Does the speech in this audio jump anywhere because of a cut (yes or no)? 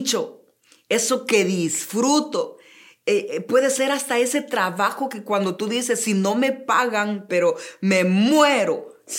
yes